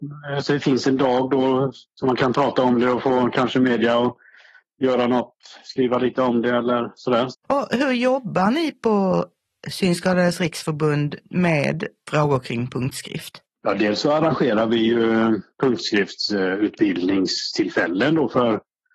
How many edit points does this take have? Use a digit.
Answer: 1